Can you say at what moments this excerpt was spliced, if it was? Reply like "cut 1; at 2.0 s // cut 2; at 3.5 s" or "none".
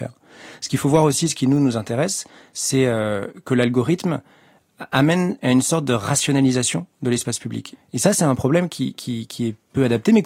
cut 1; at 7.7 s